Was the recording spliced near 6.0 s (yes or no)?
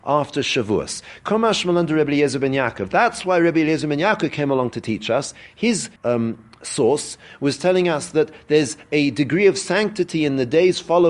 yes